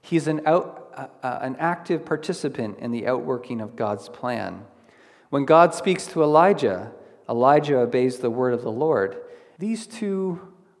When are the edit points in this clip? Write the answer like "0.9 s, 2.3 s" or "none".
9.6 s